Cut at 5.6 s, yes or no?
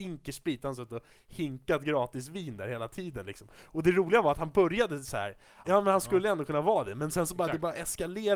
yes